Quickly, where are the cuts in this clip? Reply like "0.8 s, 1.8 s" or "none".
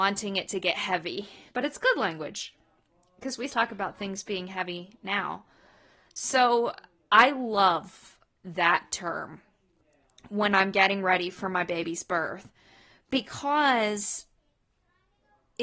1.5 s, 3.5 s